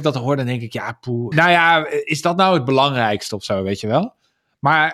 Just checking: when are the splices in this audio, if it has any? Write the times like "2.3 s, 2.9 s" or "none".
1.3 s